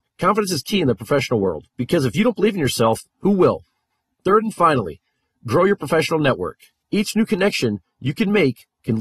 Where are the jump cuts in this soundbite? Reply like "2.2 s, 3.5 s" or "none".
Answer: 3.1 s, 6.8 s